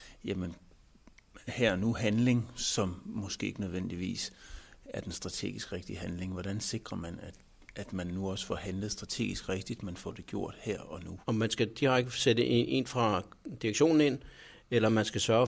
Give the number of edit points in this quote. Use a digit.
1